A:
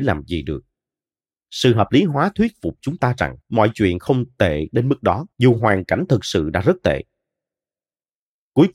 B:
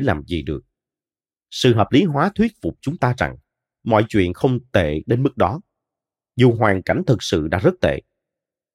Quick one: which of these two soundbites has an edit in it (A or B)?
A